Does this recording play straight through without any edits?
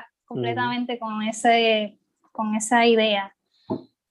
yes; 0 cuts

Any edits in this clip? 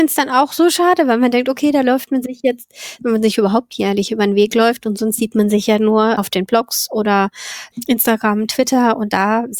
yes; 1 cut; at 3.0 s

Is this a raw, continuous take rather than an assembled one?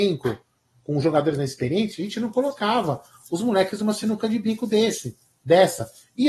yes; 0 cuts

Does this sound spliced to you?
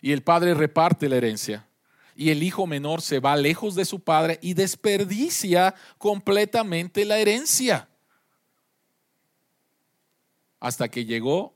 no; 0 cuts

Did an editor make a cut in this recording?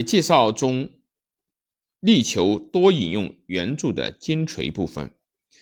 no; 0 cuts

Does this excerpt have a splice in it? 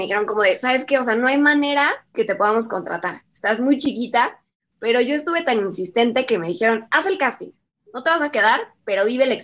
no; 0 cuts

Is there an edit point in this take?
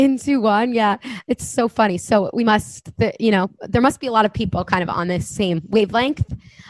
no; 0 cuts

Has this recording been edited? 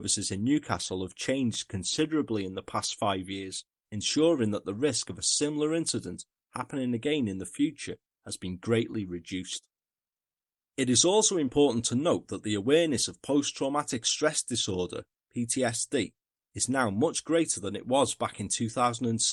no; 0 cuts

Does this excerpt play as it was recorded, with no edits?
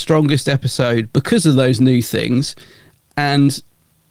no; 1 cut; at 1.1 s

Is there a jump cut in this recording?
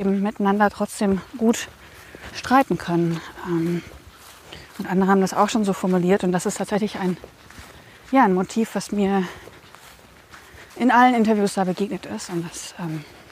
yes; 1 cut; at 10.7 s

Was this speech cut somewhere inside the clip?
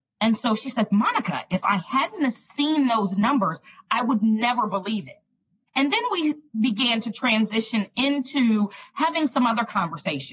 yes; 1 cut; at 5.7 s

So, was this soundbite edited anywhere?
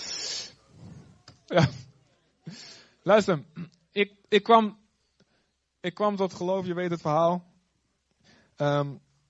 yes; 1 cut; at 1.5 s

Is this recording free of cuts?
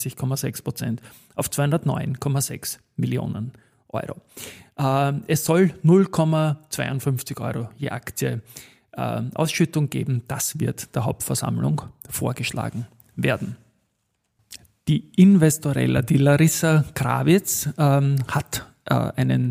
yes; 0 cuts

